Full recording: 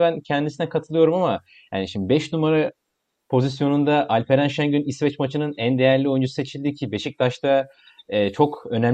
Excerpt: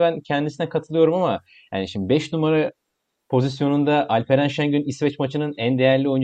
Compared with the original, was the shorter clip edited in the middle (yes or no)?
no